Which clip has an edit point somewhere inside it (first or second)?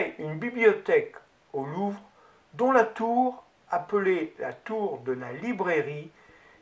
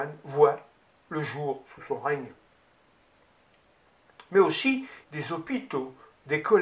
second